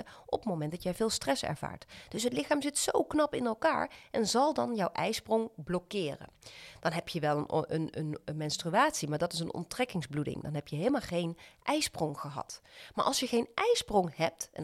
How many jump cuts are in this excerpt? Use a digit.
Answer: 0